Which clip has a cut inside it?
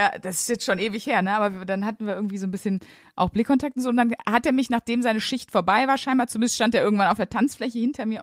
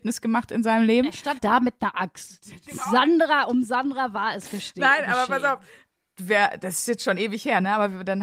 second; 1 cut; at 1.4 s

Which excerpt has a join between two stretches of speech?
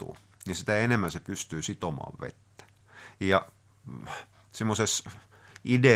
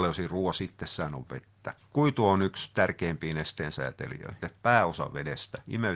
second; 2 cuts; at 1.8 s, 4.4 s

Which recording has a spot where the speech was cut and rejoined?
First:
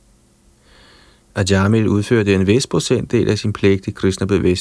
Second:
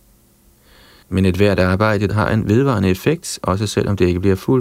second; 2 cuts; at 1.0 s, 2.1 s

